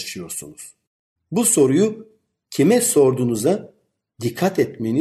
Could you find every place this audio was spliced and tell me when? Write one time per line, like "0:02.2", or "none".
0:01.2